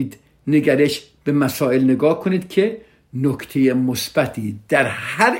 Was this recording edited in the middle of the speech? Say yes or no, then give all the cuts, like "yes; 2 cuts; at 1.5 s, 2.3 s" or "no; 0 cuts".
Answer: no; 0 cuts